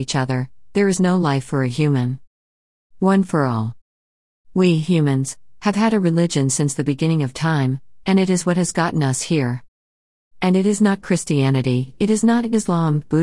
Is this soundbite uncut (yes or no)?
yes